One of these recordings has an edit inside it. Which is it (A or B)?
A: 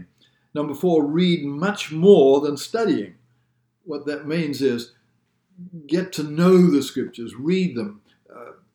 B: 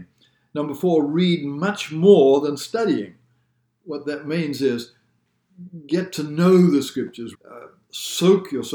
B